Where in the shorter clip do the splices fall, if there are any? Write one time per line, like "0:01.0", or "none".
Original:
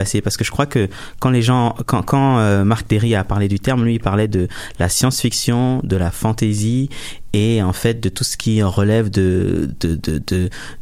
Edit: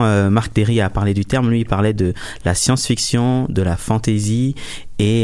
none